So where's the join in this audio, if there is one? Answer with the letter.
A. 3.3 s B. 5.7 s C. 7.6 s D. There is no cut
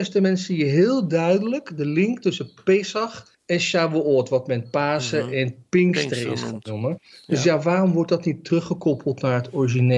A